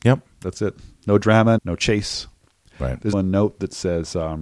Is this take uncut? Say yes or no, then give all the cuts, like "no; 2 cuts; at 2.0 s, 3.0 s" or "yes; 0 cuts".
no; 2 cuts; at 1.6 s, 3.1 s